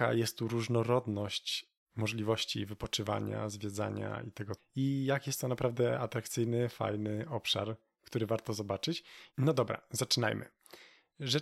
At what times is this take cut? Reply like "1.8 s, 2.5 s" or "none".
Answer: 4.6 s, 9.3 s